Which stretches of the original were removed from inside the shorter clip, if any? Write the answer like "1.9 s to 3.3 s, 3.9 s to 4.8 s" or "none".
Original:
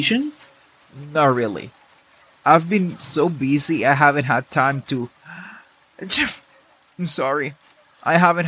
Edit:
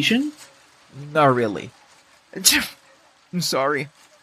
2.2 s to 5.8 s